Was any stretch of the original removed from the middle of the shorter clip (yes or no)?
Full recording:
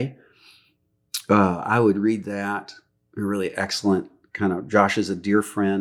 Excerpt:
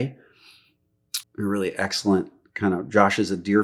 yes